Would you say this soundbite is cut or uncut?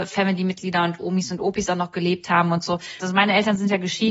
cut